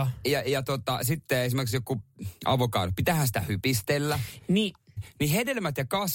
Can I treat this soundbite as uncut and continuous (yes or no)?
no